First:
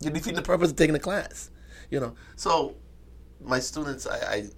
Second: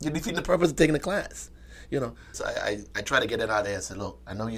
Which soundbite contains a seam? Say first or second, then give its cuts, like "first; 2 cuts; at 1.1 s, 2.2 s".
second; 1 cut; at 2.3 s